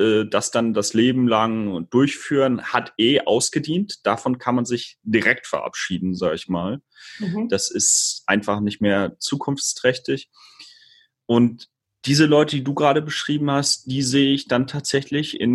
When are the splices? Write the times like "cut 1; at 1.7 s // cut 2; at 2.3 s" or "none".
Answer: none